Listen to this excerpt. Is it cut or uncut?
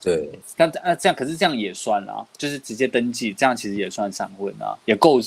uncut